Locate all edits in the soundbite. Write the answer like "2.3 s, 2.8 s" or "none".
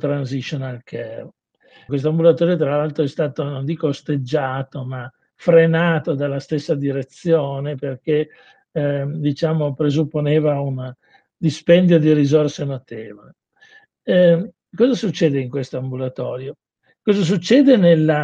1.9 s